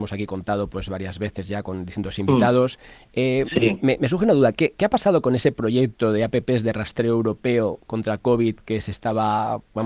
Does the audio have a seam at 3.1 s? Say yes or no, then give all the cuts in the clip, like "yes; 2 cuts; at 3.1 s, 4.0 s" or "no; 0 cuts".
no; 0 cuts